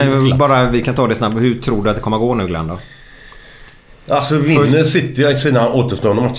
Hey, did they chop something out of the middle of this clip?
no; 0 cuts

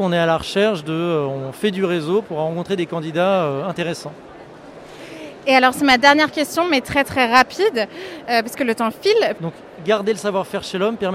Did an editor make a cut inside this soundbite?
yes; 1 cut; at 9.4 s

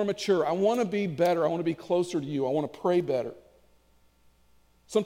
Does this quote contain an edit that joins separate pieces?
no; 0 cuts

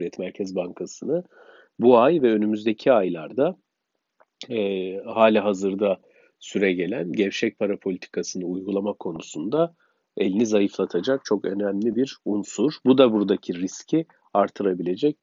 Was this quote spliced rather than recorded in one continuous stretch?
no; 0 cuts

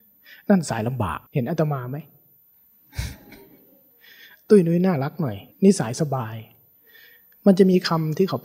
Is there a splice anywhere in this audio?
yes; 2 cuts; at 1.3 s, 5.5 s

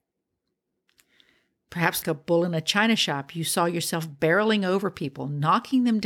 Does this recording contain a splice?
yes; 1 cut; at 2.0 s

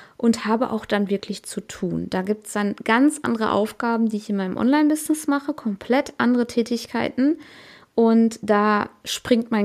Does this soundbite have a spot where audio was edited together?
no; 0 cuts

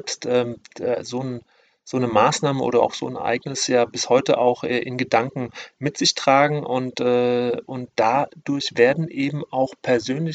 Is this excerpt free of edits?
yes; 0 cuts

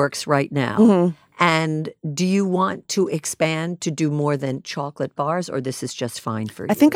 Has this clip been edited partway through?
no; 0 cuts

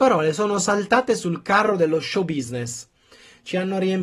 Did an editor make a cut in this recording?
no; 0 cuts

